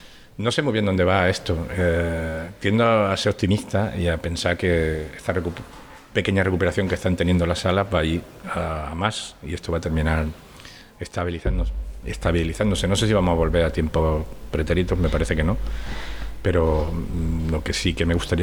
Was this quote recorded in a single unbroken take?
yes; 0 cuts

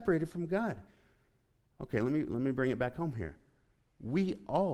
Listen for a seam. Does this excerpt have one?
no; 0 cuts

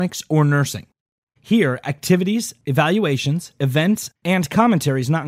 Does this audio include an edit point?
yes; 2 cuts; at 1.4 s, 3.5 s

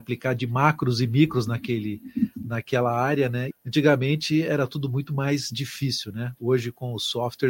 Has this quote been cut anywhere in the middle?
yes; 1 cut; at 3.5 s

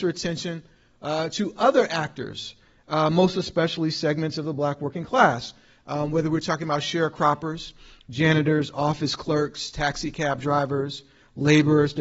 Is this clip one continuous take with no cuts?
yes; 0 cuts

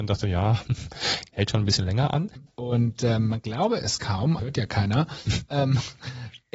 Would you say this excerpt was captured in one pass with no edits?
no; 3 cuts; at 1.3 s, 2.5 s, 4.4 s

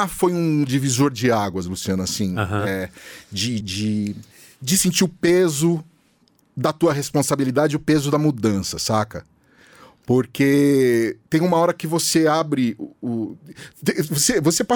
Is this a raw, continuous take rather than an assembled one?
no; 1 cut; at 3.6 s

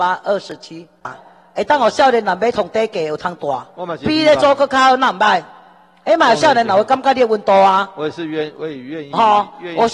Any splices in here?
no; 0 cuts

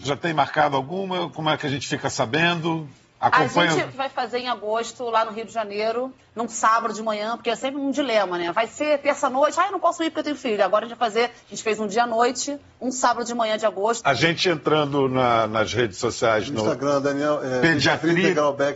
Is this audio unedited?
yes; 0 cuts

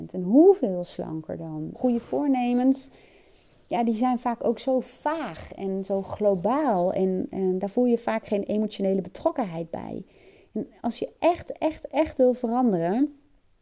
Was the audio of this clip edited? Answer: yes; 1 cut; at 1.7 s

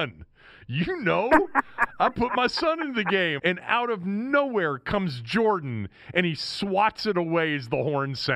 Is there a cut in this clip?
yes; 1 cut; at 3.4 s

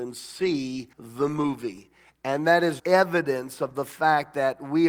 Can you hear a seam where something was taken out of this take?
yes; 2 cuts; at 0.9 s, 2.8 s

